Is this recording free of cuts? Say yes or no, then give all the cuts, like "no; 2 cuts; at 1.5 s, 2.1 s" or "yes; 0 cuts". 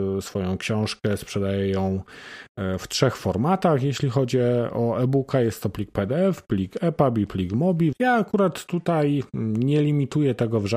no; 1 cut; at 7.9 s